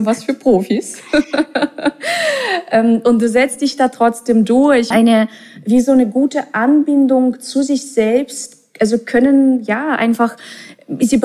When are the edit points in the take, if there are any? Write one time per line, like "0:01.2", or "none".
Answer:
0:04.9